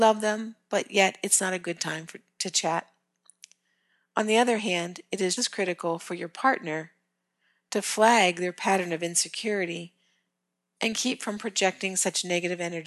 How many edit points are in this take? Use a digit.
1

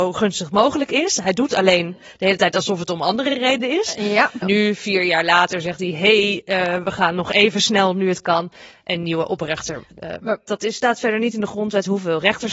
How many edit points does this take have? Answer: 2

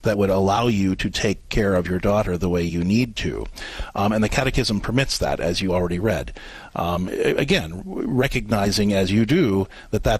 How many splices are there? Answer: 0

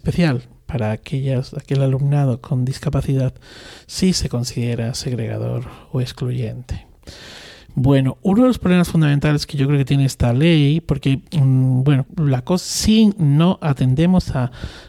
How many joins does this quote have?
1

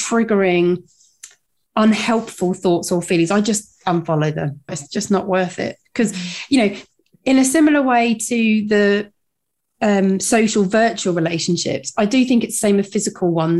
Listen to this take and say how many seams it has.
1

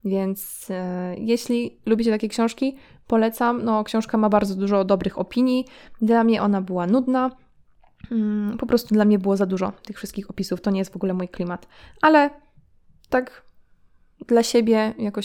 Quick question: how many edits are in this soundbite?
0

